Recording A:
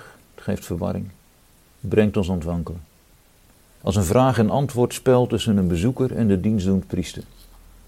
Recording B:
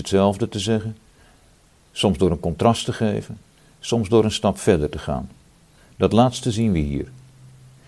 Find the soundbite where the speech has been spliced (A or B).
A